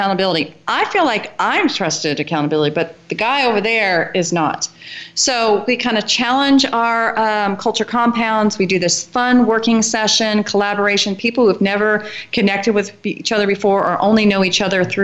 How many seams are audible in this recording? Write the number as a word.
zero